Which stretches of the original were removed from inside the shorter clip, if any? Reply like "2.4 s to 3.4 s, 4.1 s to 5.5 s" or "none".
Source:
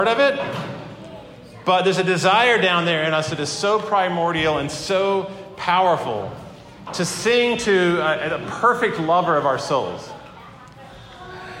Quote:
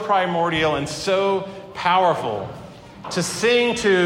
none